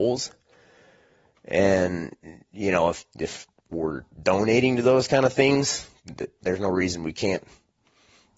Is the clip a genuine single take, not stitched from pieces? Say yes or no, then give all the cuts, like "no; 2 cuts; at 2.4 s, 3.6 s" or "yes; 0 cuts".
yes; 0 cuts